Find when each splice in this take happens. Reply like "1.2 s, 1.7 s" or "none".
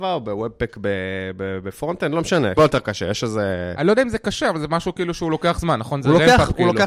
2.6 s